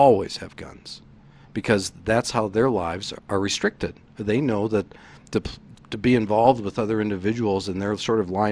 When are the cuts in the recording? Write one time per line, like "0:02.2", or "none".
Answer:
0:03.2
0:05.7